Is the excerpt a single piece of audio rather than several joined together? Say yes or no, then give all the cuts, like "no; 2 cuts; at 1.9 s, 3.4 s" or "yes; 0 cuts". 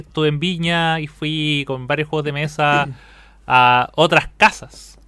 yes; 0 cuts